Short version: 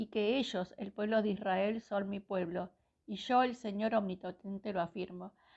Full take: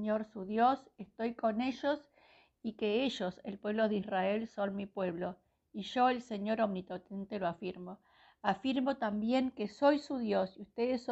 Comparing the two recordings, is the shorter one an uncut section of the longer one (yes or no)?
yes